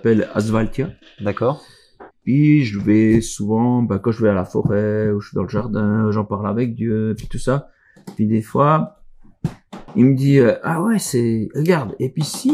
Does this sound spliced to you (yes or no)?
yes